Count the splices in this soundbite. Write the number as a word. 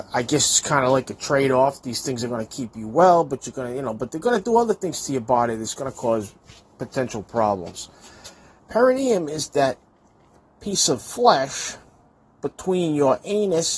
one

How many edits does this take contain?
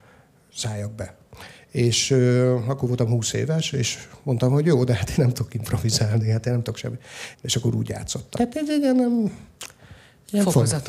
two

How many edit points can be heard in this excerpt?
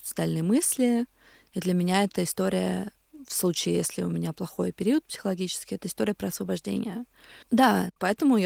one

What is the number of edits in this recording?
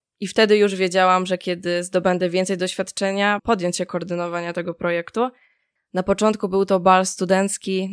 two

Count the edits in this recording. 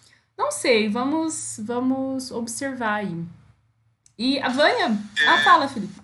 zero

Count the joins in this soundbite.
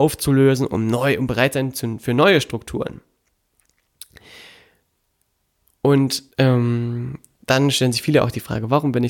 one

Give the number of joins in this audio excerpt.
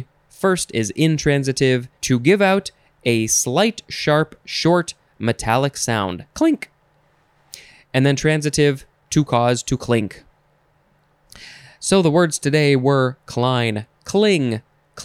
three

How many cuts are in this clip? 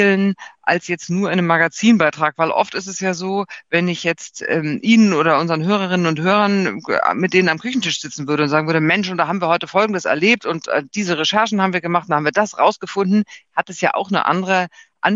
zero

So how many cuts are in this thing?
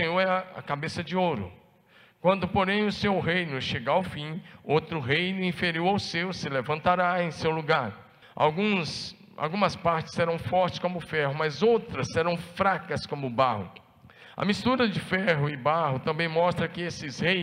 one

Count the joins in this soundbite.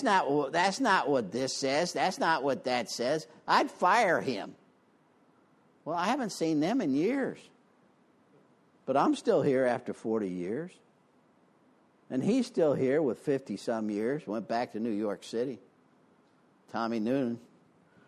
zero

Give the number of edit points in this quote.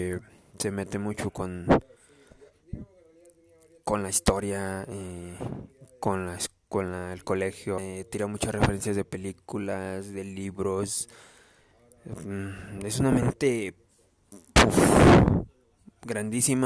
one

